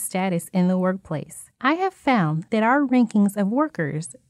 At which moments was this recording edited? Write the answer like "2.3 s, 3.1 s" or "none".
1.5 s